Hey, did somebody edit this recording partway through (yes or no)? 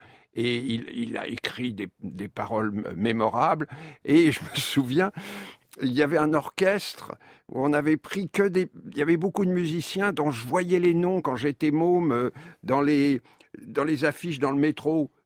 yes